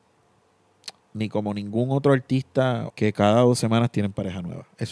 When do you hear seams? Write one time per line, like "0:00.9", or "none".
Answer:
0:01.0
0:02.9